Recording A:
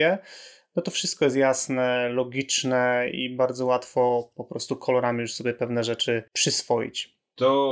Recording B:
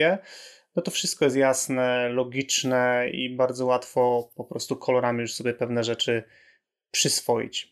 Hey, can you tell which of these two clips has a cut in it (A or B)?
A